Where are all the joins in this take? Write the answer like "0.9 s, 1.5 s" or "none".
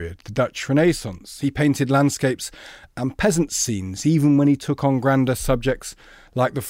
none